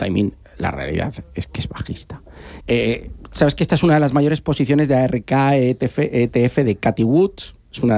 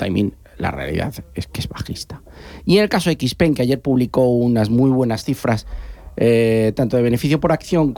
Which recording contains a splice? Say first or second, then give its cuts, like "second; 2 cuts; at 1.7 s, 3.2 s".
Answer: first; 1 cut; at 2.6 s